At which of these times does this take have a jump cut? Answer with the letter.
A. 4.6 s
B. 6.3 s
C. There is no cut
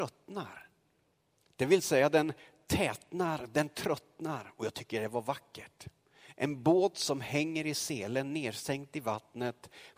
C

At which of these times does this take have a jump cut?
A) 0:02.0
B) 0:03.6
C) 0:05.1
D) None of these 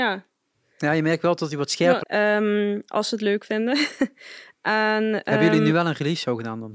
A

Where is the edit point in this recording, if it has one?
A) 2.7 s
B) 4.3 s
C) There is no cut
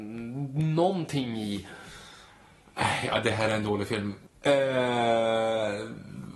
B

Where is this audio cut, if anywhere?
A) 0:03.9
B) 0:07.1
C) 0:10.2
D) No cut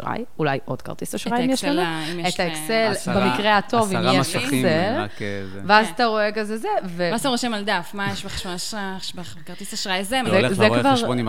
C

